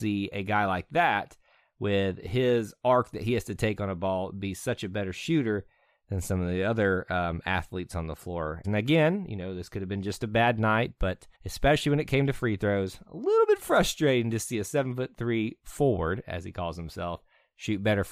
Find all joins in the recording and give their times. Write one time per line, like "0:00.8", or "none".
0:08.6
0:11.3